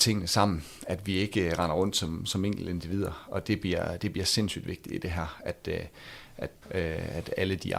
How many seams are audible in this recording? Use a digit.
1